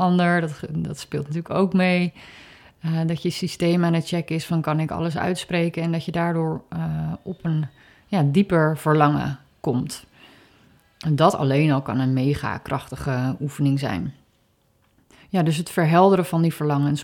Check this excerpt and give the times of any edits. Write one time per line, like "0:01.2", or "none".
none